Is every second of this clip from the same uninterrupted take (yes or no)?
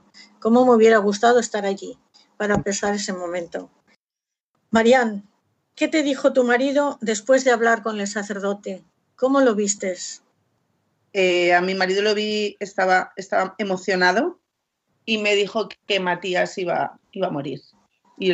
yes